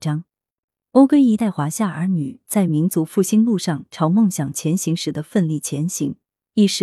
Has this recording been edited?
yes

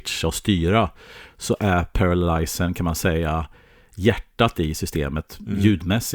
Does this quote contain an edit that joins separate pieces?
no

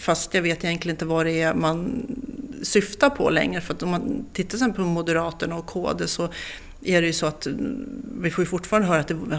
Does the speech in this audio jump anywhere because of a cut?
no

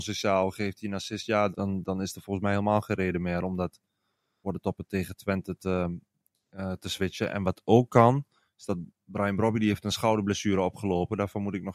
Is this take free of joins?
no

